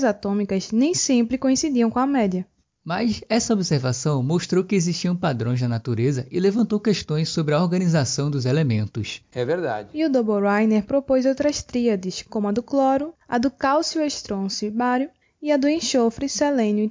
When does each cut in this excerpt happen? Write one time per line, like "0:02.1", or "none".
0:09.3
0:13.1